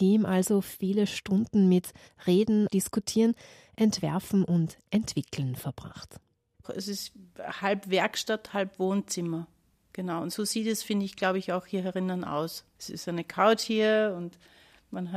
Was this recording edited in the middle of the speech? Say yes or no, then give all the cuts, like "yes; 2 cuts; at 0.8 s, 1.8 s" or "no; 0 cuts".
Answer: yes; 3 cuts; at 2.7 s, 6.6 s, 12.8 s